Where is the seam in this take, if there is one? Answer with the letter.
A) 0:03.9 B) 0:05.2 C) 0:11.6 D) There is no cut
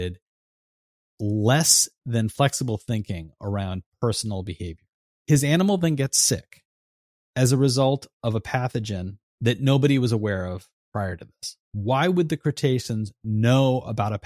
D